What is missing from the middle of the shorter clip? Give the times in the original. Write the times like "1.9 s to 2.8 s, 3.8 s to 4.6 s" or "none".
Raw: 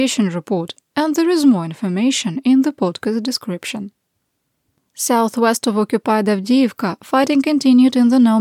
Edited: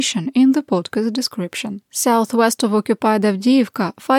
4.0 s to 4.9 s